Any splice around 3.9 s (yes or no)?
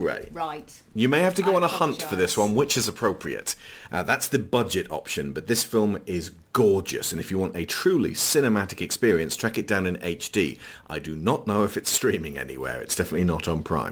yes